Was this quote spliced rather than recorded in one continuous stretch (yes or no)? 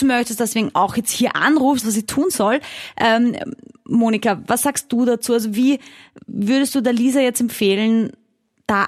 yes